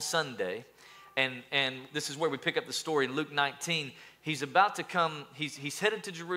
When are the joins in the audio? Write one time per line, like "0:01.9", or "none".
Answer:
none